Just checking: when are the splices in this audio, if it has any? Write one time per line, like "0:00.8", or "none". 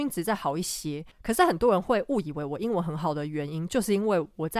none